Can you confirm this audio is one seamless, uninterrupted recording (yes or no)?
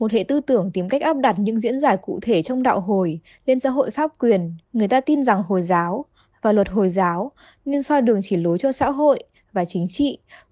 no